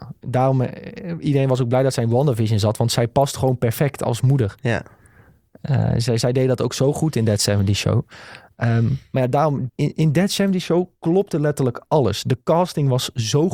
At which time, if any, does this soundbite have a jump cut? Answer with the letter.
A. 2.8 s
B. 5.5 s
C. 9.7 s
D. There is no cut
C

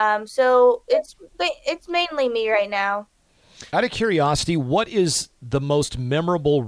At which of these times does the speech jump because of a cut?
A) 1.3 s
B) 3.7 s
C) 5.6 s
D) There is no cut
B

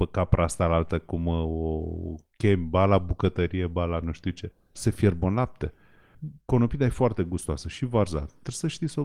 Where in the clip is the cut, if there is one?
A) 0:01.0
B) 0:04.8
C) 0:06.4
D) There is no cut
B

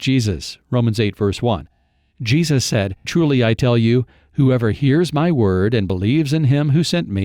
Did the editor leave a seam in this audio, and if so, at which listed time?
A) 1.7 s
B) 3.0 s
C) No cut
B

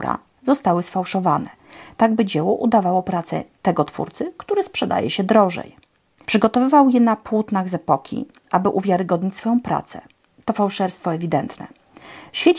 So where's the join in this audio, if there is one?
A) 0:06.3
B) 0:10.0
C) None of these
A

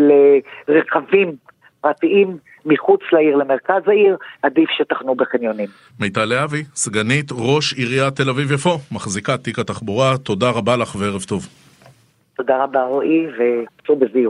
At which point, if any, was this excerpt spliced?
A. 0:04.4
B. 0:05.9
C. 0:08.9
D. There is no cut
A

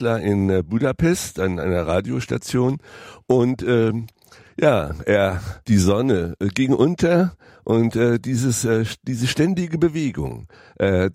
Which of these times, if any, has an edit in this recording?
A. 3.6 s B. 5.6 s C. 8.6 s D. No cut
B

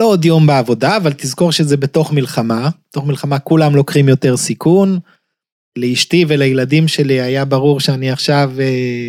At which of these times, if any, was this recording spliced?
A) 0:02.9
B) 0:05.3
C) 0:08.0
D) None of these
D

